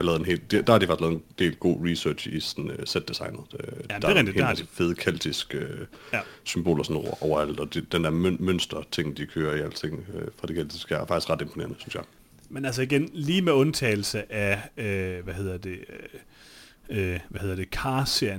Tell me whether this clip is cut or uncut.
uncut